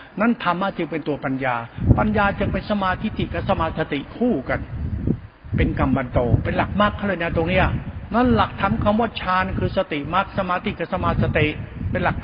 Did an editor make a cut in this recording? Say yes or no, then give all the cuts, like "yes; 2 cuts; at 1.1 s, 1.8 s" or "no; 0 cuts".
no; 0 cuts